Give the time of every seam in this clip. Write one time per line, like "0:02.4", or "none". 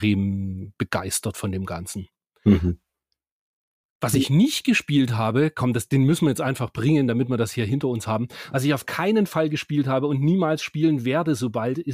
none